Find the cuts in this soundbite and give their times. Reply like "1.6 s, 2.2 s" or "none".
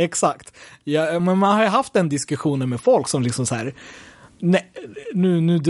none